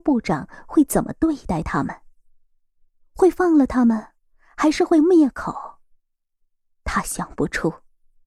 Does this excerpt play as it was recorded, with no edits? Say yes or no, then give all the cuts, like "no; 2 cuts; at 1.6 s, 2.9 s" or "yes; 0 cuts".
yes; 0 cuts